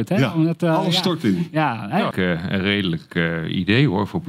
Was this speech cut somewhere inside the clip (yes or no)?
yes